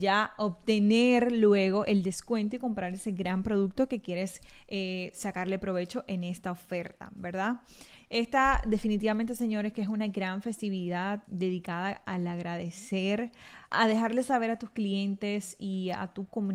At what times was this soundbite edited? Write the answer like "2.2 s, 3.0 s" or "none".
11.2 s, 13.7 s